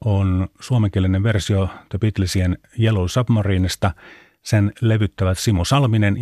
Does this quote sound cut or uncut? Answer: uncut